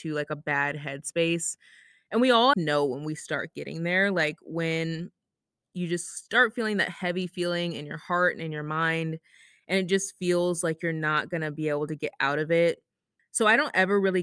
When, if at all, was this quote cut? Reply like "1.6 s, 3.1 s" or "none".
2.5 s, 13.2 s